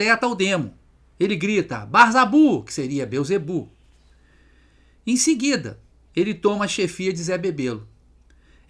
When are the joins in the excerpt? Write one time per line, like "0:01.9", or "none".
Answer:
0:06.1